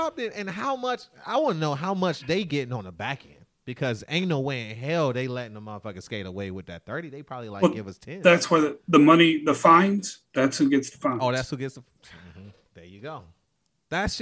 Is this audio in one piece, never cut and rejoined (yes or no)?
yes